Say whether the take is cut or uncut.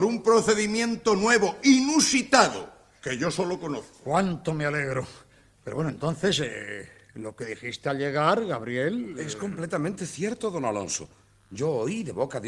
uncut